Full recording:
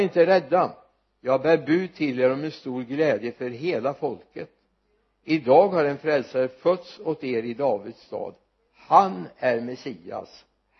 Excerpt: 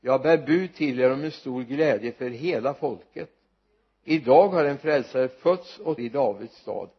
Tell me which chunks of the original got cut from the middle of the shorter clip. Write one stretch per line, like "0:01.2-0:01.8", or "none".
0:07.2-0:07.4